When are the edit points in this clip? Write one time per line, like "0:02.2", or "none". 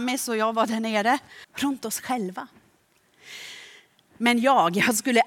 0:01.4